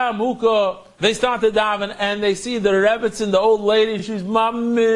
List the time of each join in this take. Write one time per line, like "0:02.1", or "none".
none